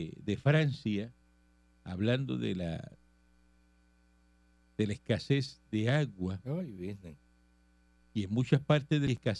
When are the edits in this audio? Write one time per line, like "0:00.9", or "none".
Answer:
none